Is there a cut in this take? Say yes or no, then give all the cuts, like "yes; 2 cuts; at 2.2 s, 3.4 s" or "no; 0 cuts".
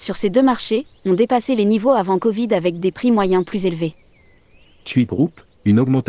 no; 0 cuts